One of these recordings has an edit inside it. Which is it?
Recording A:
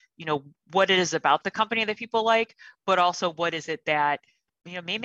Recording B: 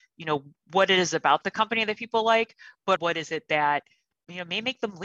B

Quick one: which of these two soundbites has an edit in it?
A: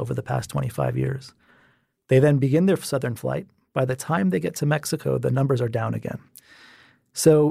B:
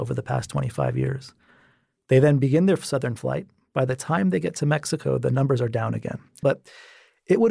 B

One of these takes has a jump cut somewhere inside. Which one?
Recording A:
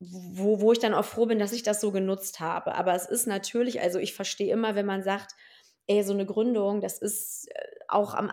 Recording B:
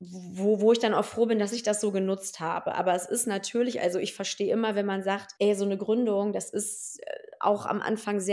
B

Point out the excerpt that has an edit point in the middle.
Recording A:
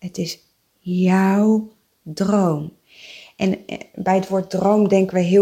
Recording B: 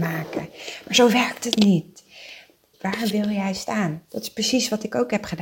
B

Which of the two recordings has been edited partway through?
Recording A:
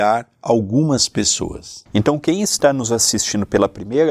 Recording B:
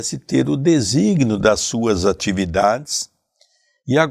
A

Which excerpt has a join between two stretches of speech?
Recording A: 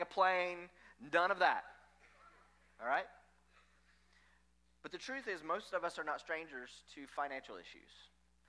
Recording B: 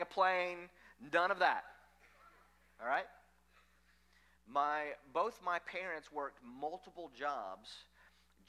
B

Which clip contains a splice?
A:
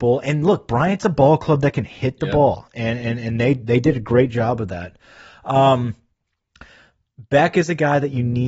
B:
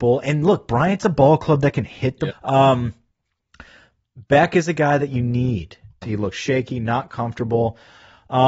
B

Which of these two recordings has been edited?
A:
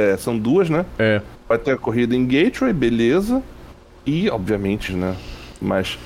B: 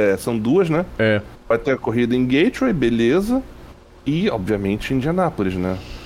A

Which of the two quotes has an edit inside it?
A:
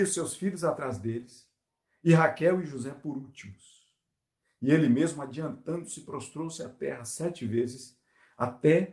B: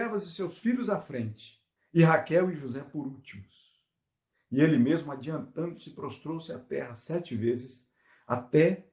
B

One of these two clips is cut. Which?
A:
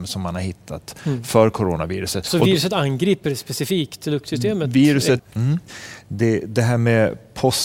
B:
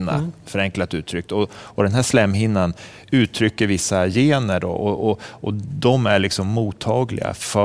A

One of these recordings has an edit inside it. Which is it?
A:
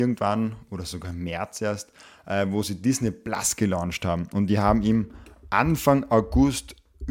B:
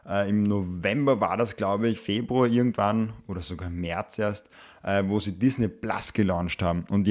B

